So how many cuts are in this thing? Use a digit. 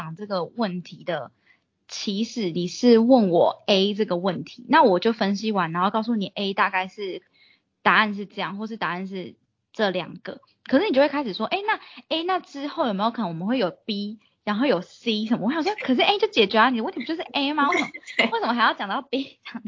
0